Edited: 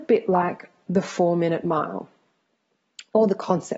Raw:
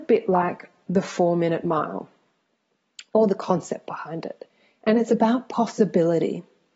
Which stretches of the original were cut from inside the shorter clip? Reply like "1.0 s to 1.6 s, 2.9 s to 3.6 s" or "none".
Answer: none